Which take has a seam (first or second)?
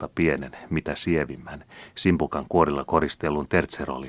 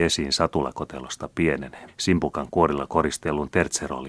second